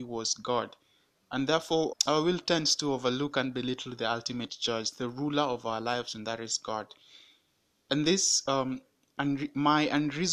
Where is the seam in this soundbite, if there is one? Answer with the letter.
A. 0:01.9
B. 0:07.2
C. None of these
A